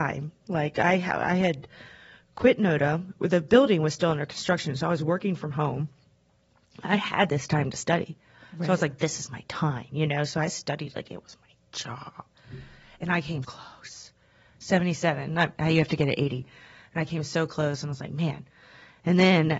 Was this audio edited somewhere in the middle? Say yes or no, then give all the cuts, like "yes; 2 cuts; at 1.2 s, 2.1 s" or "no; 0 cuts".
yes; 1 cut; at 13.4 s